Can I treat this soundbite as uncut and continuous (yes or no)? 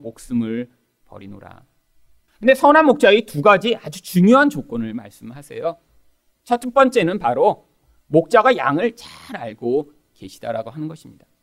no